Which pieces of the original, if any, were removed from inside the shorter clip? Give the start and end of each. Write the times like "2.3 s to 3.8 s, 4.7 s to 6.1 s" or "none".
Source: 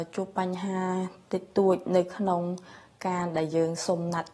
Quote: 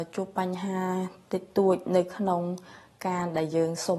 none